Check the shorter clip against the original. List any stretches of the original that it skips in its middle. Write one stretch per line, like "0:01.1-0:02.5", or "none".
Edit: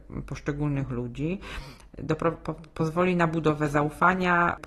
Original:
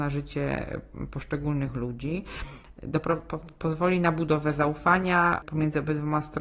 none